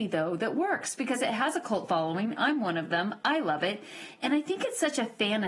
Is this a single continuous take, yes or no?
yes